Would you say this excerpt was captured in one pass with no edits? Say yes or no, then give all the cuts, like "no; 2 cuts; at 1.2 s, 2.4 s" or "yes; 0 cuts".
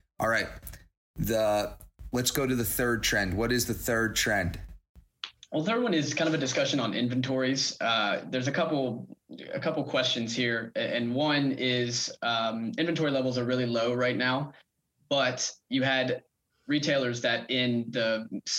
yes; 0 cuts